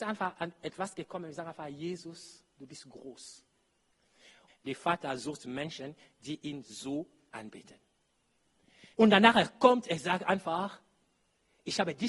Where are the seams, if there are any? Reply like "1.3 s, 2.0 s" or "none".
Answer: 4.5 s, 9.0 s